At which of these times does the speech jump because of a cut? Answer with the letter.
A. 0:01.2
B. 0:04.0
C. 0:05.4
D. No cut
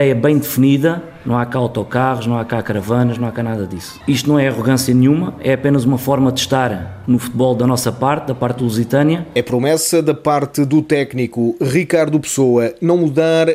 B